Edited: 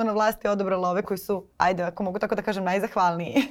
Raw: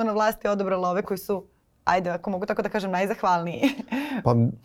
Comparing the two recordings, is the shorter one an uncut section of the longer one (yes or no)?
no